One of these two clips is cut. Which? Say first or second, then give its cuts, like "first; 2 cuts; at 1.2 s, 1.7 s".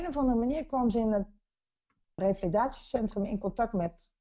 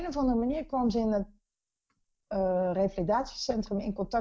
first; 1 cut; at 2.2 s